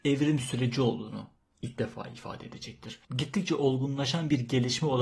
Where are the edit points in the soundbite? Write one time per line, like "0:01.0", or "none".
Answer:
0:03.1